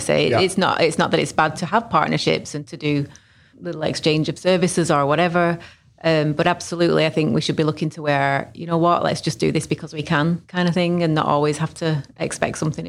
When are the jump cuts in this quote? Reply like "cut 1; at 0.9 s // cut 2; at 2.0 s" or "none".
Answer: none